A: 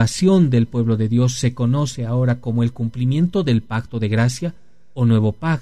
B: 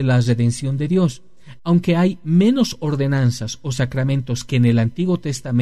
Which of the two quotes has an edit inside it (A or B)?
B